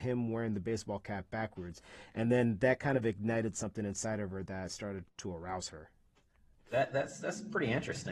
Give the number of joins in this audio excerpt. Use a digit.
0